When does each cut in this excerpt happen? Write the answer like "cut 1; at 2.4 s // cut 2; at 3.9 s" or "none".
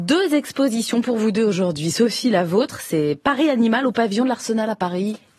none